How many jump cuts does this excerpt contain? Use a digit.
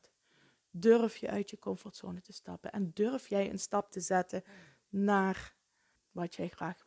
1